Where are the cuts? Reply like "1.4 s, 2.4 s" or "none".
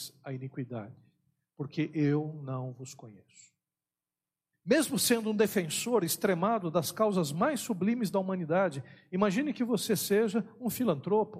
4.5 s